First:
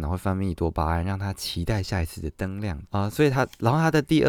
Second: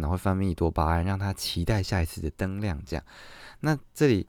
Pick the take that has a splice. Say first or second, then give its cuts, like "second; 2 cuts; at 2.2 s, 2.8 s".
first; 1 cut; at 2.9 s